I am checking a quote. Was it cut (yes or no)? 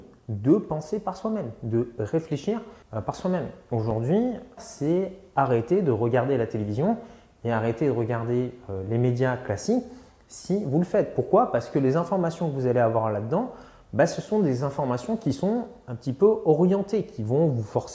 yes